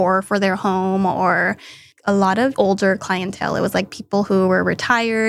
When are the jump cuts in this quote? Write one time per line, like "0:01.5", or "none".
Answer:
0:02.5